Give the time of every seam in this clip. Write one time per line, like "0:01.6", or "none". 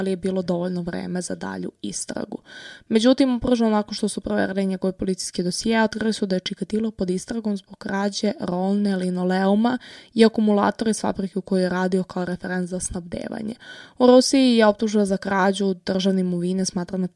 none